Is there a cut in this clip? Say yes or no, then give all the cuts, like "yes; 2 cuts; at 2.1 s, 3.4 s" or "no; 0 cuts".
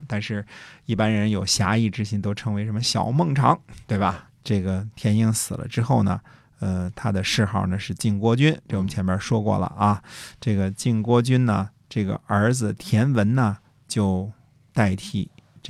yes; 1 cut; at 4.3 s